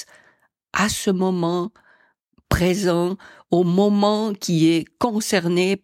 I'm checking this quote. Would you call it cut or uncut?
uncut